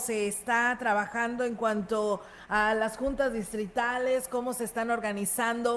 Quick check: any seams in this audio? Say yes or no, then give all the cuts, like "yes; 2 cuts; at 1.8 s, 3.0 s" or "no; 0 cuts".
no; 0 cuts